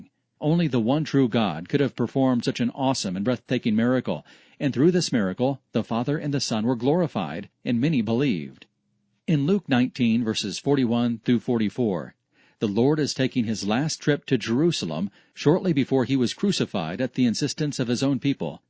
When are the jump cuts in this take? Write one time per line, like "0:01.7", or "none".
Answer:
none